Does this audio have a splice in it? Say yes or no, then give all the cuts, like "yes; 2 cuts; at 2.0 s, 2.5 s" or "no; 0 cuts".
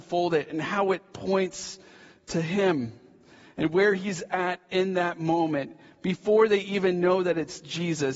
no; 0 cuts